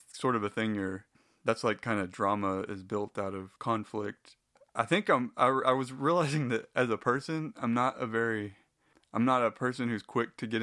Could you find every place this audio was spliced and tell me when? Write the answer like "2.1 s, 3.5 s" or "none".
3.6 s